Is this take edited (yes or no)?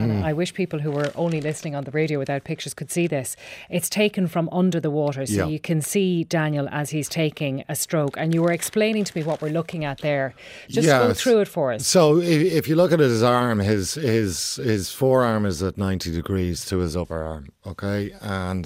no